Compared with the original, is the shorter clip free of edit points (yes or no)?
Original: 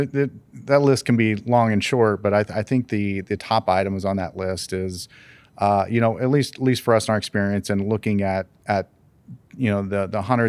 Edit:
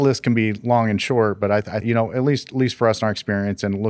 no